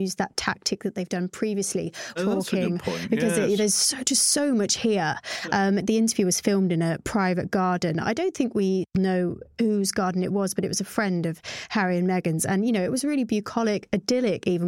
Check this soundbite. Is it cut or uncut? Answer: cut